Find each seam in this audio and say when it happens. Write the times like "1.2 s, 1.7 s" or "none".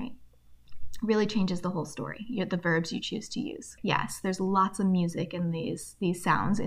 3.8 s